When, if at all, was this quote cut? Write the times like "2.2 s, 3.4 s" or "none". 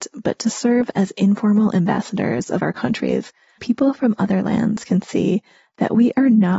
3.6 s